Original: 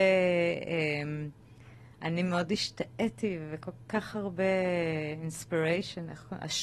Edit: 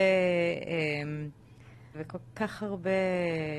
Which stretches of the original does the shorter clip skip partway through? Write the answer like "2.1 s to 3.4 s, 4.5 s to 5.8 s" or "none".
1.9 s to 3.5 s